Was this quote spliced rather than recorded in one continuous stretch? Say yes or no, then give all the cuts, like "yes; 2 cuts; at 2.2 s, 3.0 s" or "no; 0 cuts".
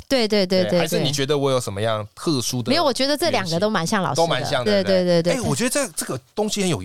yes; 1 cut; at 4.7 s